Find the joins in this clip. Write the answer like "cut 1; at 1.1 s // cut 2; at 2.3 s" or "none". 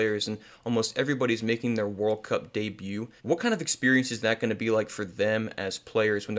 cut 1; at 3.2 s

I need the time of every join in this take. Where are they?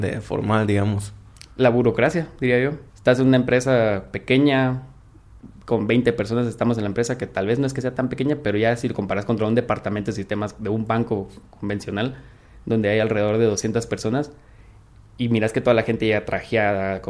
cut 1; at 2.9 s

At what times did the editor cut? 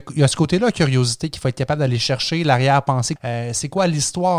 cut 1; at 3.2 s

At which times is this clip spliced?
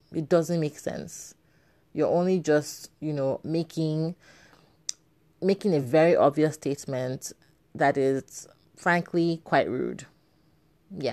none

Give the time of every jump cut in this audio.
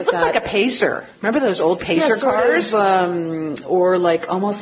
cut 1; at 1.1 s

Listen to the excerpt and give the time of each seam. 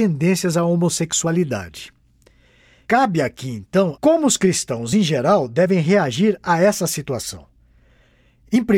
cut 1; at 4.0 s

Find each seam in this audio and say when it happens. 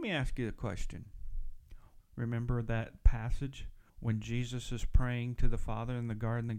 cut 1; at 2.0 s // cut 2; at 3.9 s

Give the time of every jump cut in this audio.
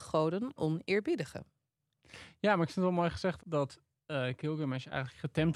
cut 1; at 3.4 s

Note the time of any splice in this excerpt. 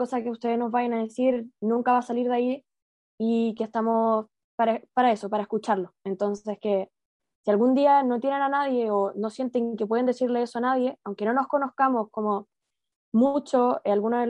none

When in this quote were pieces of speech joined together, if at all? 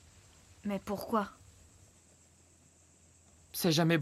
none

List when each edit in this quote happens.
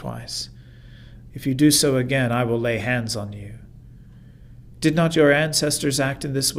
cut 1; at 1.3 s // cut 2; at 4.7 s

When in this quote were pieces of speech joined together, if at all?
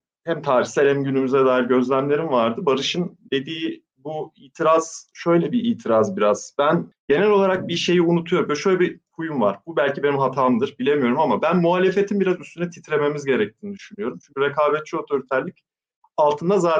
none

